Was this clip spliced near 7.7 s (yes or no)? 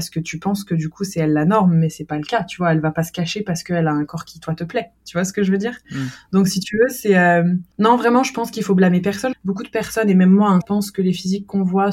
yes